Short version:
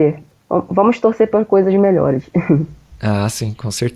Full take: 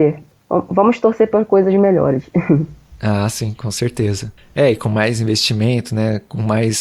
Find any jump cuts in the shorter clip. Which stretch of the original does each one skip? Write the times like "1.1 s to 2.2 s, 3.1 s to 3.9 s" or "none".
none